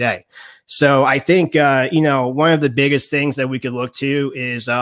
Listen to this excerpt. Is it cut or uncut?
uncut